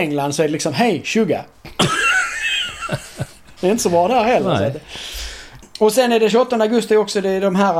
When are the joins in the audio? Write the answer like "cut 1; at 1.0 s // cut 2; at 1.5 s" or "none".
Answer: none